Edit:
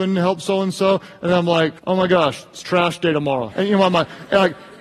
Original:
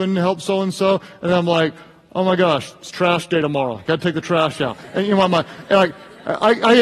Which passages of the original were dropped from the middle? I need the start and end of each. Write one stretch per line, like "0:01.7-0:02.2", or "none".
0:01.8-0:02.1
0:03.8-0:04.9